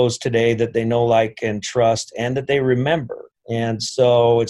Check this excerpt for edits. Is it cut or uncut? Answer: cut